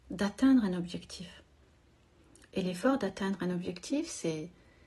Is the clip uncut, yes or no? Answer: yes